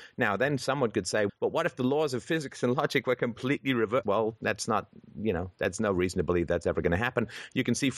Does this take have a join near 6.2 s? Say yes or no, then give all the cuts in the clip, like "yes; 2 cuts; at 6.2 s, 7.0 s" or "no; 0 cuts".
no; 2 cuts; at 1.3 s, 4.0 s